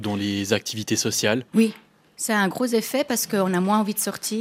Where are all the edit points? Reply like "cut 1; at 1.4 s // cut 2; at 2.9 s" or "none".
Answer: cut 1; at 1.5 s